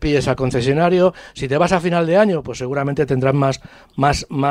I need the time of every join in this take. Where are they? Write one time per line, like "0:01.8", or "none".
none